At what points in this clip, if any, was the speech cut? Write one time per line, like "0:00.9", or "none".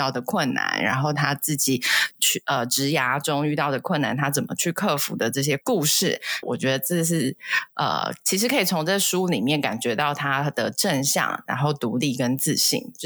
0:06.4

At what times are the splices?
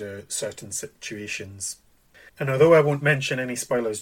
0:02.3

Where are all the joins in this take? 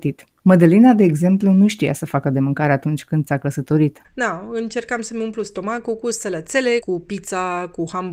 0:04.0
0:06.8

